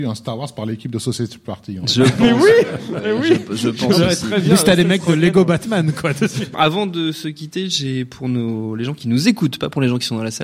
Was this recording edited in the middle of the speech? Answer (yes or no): yes